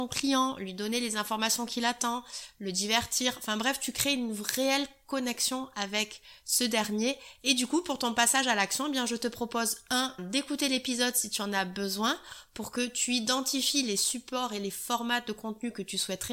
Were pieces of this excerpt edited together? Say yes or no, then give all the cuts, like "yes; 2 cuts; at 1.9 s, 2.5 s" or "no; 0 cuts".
yes; 2 cuts; at 7.4 s, 10.2 s